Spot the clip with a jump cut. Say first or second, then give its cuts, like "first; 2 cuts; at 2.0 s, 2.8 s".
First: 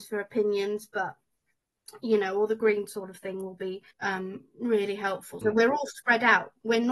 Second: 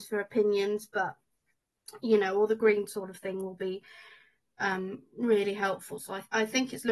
first; 2 cuts; at 3.9 s, 5.4 s